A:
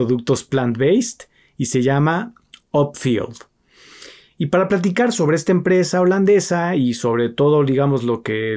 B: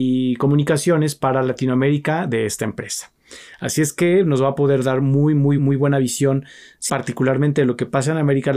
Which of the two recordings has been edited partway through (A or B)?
B